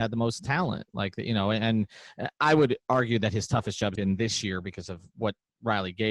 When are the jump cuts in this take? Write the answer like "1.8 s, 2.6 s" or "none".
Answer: 4.0 s